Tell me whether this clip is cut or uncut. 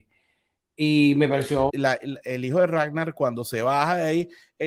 cut